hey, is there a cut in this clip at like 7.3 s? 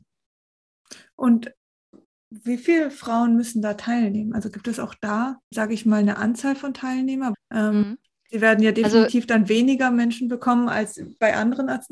yes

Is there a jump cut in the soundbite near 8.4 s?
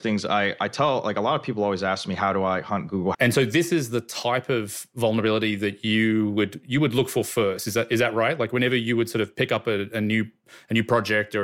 no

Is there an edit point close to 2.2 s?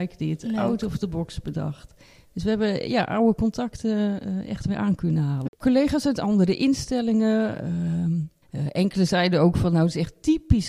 no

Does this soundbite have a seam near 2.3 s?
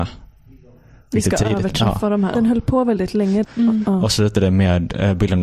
yes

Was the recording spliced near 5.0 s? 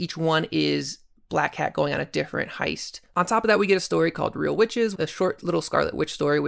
yes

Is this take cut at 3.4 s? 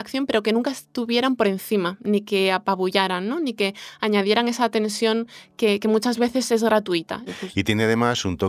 no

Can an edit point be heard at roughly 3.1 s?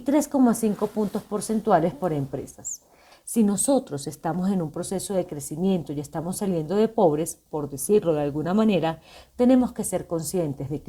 yes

